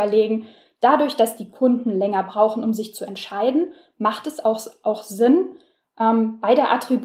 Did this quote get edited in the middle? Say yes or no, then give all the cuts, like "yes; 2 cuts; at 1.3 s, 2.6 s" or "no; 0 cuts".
no; 0 cuts